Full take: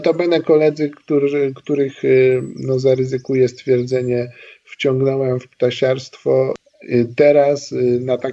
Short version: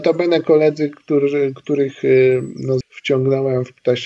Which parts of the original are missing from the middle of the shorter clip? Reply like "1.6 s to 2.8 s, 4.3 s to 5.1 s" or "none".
2.8 s to 4.6 s